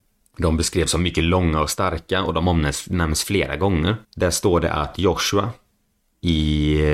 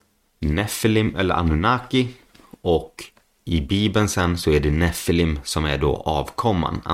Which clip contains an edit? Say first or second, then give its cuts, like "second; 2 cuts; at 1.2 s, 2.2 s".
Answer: first; 1 cut; at 4.0 s